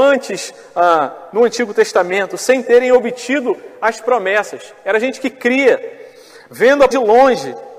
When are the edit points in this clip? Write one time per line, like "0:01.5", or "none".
0:06.9